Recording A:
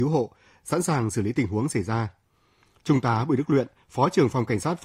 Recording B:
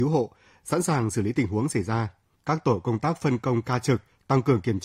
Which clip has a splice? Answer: B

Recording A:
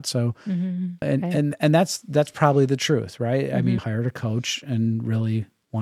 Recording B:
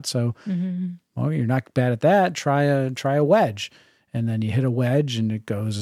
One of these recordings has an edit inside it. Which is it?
A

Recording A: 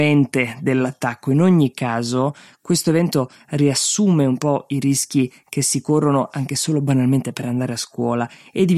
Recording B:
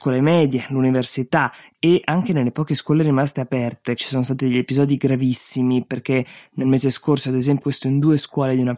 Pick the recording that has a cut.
B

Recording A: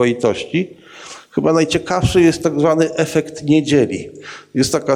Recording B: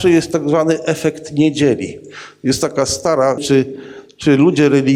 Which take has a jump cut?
B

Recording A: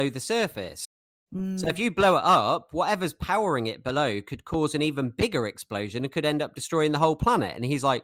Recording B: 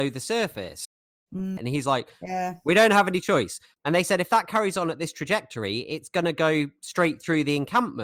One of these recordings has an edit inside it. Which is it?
B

